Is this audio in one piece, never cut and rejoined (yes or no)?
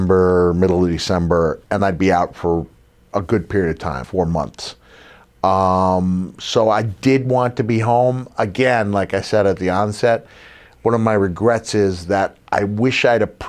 no